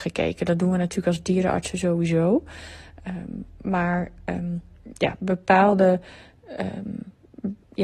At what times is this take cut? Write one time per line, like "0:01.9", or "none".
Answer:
none